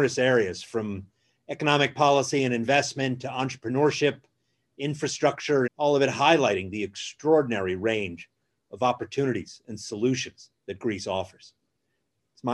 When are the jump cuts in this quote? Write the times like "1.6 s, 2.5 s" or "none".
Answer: 5.7 s, 10.6 s